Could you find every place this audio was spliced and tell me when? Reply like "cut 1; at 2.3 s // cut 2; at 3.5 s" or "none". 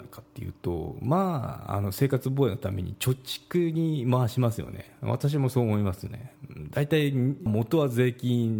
cut 1; at 7.5 s